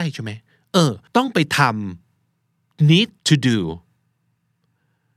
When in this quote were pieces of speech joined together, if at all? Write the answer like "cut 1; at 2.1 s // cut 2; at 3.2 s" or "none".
cut 1; at 1.1 s // cut 2; at 3.2 s